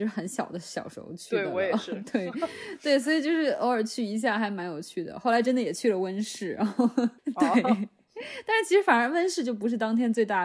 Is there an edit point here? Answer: no; 0 cuts

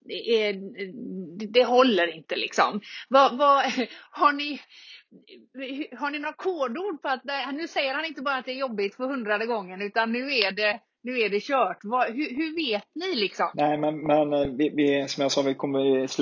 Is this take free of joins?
yes; 0 cuts

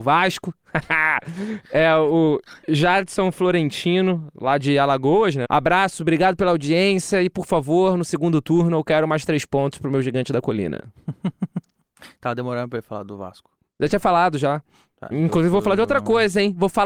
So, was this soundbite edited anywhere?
yes; 2 cuts; at 5.4 s, 15.1 s

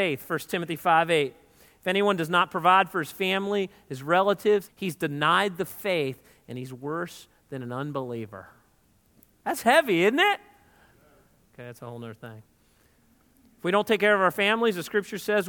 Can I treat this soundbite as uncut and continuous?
no; 2 cuts; at 4.7 s, 11.5 s

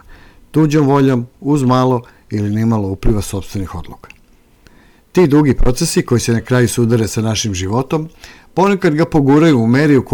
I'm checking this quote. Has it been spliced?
no; 0 cuts

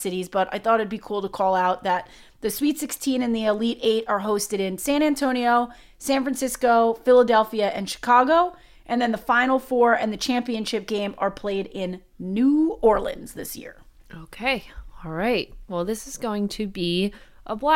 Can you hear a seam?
no; 0 cuts

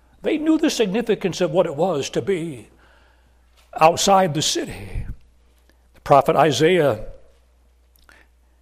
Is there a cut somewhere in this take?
no; 0 cuts

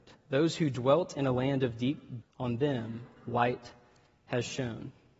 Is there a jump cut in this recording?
yes; 1 cut; at 2.2 s

